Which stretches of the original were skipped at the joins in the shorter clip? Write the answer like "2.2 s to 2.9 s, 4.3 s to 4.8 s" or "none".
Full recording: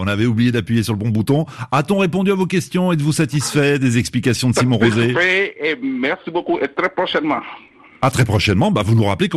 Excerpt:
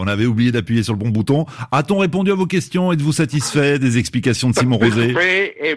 none